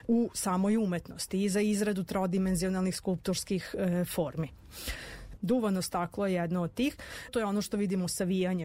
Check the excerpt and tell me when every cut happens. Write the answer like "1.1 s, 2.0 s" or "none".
5.4 s, 7.3 s